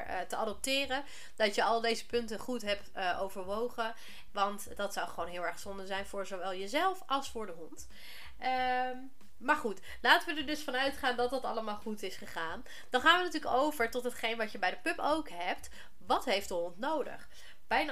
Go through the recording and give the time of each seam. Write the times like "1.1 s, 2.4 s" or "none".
4.3 s